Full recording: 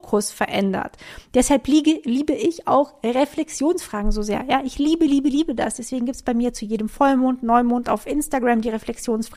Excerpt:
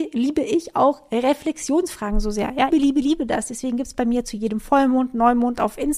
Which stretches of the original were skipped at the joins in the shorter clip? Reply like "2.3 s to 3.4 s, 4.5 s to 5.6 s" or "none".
4.6 s to 5.0 s